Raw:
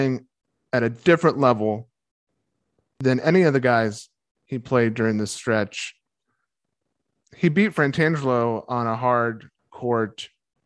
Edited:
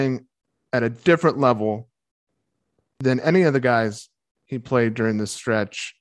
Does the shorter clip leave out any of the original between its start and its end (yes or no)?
no